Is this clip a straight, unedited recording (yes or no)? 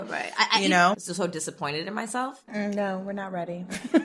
no